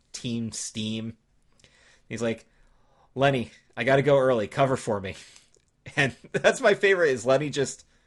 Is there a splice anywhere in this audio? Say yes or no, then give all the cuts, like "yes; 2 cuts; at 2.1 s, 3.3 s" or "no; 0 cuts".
no; 0 cuts